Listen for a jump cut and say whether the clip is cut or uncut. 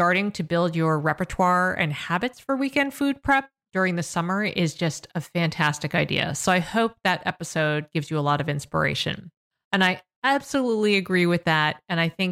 cut